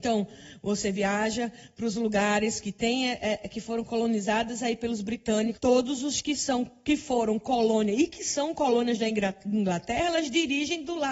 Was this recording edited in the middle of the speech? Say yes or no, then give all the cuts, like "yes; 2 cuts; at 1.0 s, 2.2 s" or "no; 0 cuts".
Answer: yes; 1 cut; at 5.6 s